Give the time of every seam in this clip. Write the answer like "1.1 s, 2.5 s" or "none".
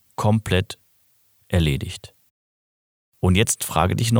none